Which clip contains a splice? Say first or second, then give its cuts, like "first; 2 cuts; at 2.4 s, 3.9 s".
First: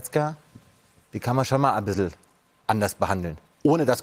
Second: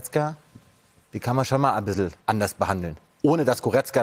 second; 1 cut; at 2.2 s